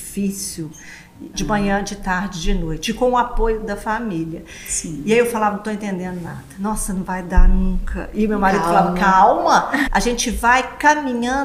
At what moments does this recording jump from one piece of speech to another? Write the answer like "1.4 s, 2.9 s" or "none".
1.3 s, 9.9 s